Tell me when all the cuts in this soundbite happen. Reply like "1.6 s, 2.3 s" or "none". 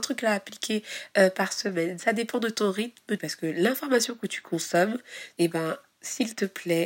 3.2 s, 5.3 s